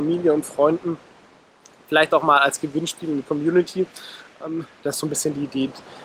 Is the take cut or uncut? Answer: uncut